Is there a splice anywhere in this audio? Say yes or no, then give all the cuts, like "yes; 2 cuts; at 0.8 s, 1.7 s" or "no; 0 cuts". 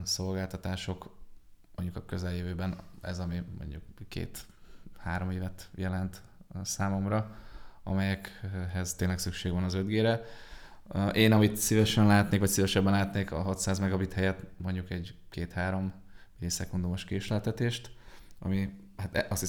no; 0 cuts